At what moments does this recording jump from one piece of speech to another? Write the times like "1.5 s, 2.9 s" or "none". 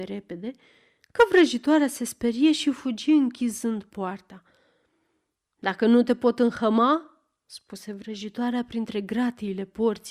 none

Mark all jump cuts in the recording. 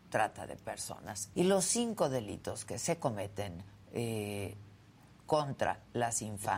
1.3 s

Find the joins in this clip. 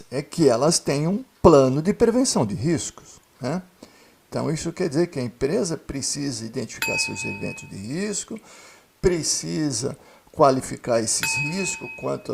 4.3 s

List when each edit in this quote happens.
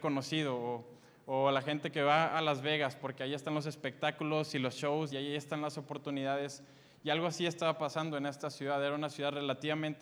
5.1 s

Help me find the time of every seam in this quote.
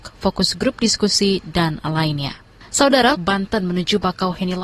3.1 s

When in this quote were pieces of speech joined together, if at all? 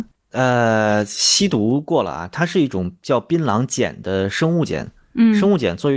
none

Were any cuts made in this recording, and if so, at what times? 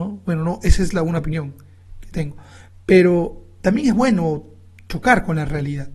none

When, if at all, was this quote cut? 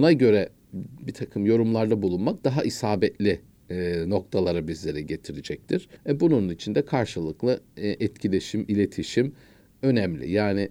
6.0 s

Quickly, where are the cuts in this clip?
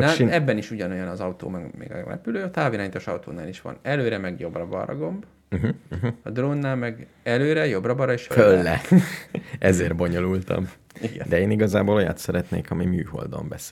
8.3 s

